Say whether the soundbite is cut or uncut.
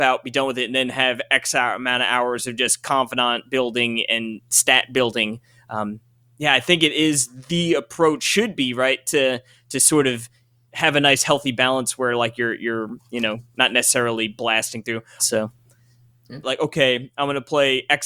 cut